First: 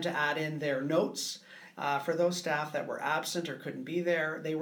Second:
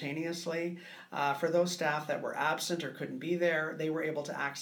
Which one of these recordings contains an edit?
first; 1 cut; at 1.7 s

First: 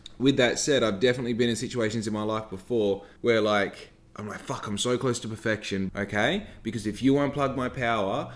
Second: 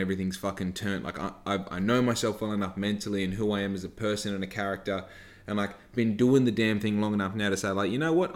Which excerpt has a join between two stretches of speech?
first; 2 cuts; at 3.2 s, 5.9 s

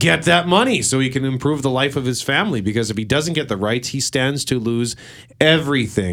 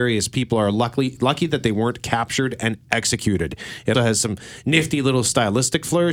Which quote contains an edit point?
second; 1 cut; at 3.9 s

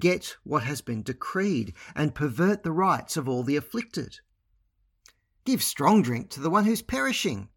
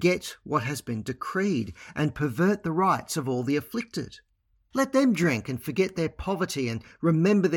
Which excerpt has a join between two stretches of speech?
second; 1 cut; at 4.7 s

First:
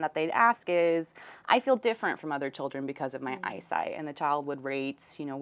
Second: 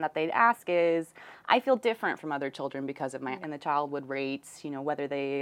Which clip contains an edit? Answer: second; 1 cut; at 3.4 s

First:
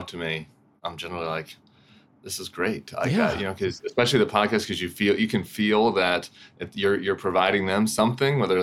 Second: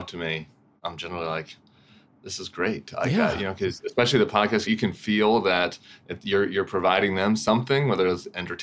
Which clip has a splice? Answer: second; 1 cut; at 4.7 s

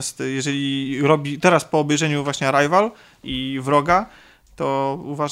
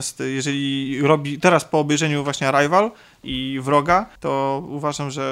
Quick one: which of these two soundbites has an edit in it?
second; 1 cut; at 4.2 s

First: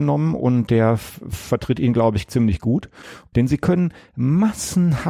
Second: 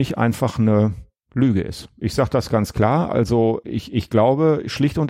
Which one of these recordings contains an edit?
first; 1 cut; at 3.3 s

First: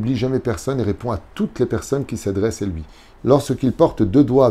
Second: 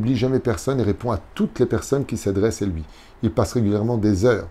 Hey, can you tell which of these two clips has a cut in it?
first; 1 cut; at 3.2 s

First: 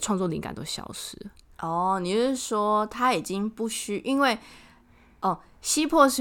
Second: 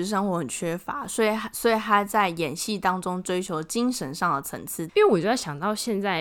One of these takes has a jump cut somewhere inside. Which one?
second; 1 cut; at 4.9 s

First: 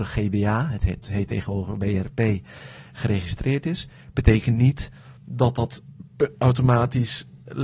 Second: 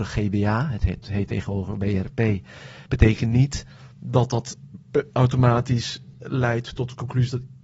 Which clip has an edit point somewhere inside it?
second; 1 cut; at 2.9 s

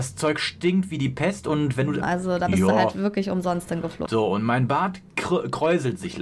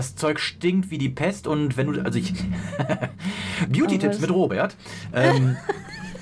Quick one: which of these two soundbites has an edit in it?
first; 2 cuts; at 2.0 s, 4.1 s

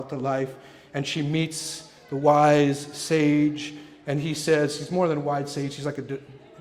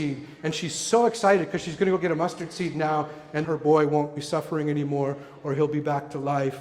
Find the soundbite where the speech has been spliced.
second; 1 cut; at 3.4 s

